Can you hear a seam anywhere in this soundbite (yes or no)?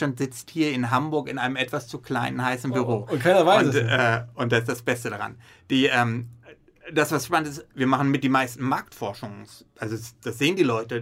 no